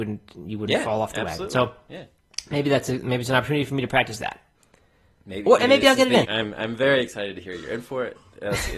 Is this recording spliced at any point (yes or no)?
yes